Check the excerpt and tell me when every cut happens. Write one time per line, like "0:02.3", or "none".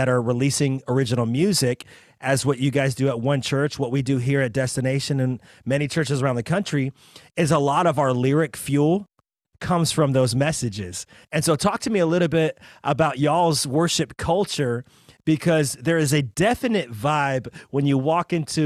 0:11.2